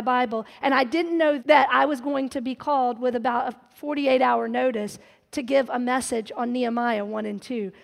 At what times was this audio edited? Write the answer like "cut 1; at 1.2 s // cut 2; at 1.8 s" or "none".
cut 1; at 1.4 s